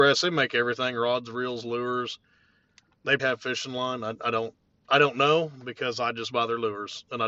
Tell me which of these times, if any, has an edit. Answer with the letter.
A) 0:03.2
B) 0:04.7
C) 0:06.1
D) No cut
A